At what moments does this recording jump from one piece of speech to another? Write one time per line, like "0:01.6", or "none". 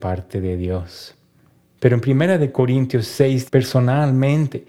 0:01.8
0:03.5